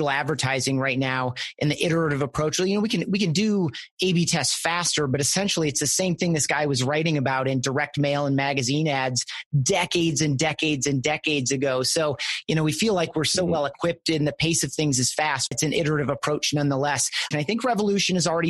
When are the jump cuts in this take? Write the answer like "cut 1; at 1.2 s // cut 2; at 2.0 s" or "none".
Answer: cut 1; at 15.5 s // cut 2; at 17.3 s